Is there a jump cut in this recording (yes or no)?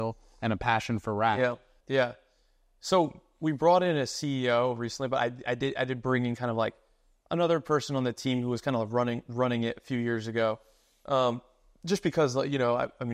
yes